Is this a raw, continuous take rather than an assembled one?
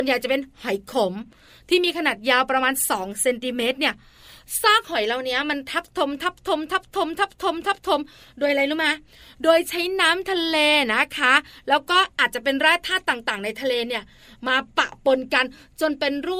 yes; 0 cuts

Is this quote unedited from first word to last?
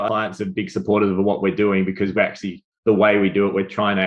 yes; 0 cuts

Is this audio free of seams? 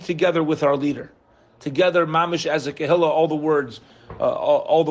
yes; 0 cuts

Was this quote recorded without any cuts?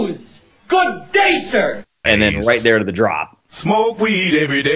no; 1 cut; at 2.0 s

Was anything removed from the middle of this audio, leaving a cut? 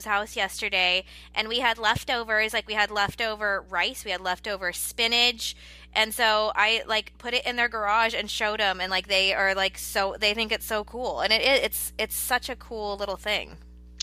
no; 0 cuts

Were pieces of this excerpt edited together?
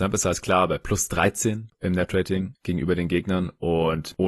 no; 0 cuts

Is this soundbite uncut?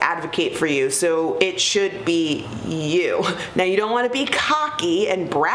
yes; 0 cuts

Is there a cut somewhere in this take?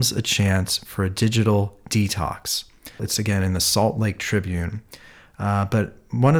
yes; 1 cut; at 3.0 s

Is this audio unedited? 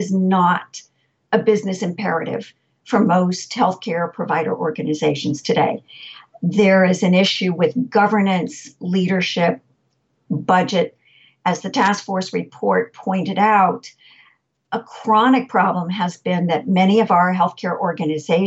no; 1 cut; at 10.1 s

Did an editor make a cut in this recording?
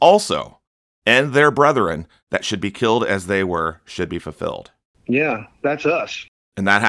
no; 0 cuts

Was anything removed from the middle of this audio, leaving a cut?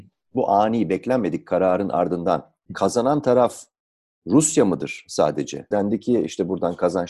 yes; 1 cut; at 5.7 s

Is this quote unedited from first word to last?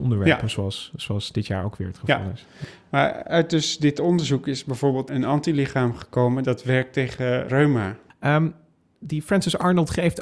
no; 1 cut; at 8.1 s

